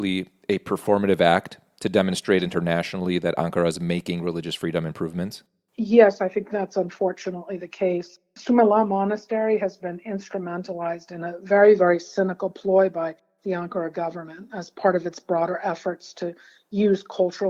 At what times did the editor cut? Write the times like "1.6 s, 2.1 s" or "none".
none